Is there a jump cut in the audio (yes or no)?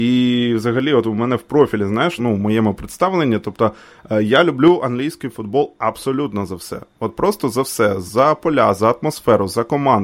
yes